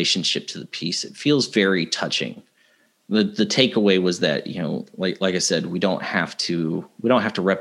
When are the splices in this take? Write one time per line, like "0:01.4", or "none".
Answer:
none